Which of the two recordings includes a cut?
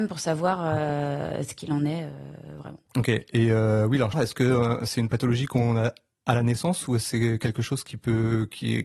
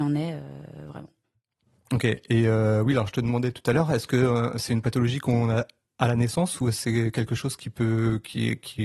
first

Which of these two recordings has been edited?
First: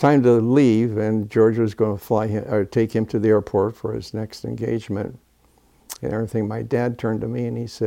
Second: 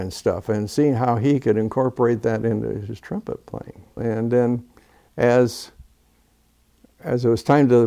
second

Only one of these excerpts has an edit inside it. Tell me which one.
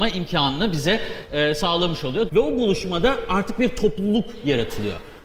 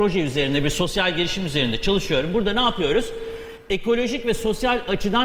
first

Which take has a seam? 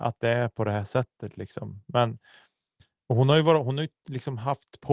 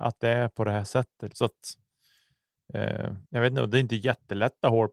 second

